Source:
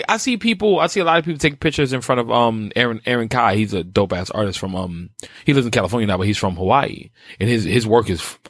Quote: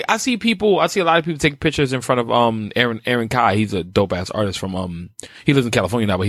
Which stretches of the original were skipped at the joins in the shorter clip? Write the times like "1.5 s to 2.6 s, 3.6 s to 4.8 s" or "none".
none